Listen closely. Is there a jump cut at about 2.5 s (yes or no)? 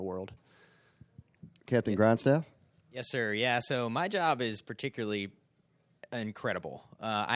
no